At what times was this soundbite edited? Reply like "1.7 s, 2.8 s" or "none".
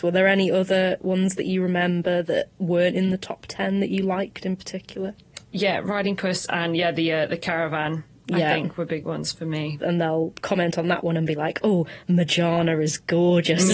9.8 s